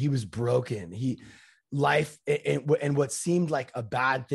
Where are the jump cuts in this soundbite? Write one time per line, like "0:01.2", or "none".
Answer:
none